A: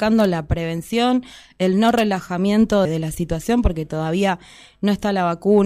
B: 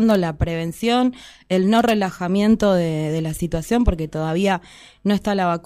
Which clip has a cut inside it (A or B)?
A